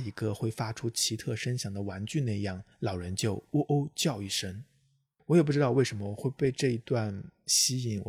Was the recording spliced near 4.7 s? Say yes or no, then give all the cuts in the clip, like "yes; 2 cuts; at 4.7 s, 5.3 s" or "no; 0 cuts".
no; 1 cut; at 2.7 s